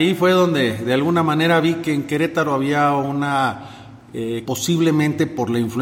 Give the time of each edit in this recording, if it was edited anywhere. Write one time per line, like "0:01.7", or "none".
0:04.4